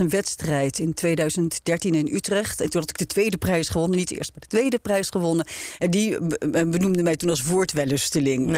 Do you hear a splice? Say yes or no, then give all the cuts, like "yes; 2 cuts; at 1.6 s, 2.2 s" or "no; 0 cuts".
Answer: no; 0 cuts